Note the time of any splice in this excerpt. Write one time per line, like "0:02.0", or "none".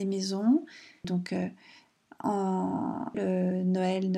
0:01.0
0:03.1